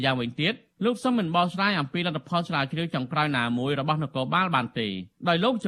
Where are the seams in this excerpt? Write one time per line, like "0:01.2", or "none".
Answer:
none